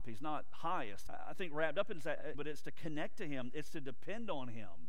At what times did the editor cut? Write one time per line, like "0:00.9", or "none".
0:01.1
0:02.3